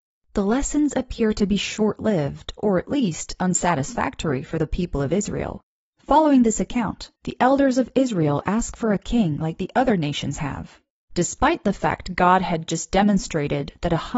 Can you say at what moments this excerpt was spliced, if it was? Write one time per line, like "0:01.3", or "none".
none